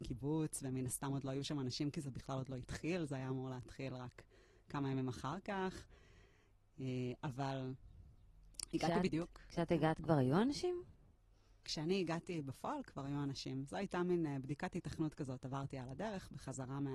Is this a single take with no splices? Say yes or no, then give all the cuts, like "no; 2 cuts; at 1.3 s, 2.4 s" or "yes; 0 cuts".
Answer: yes; 0 cuts